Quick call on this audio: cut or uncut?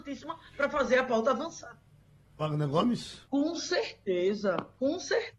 cut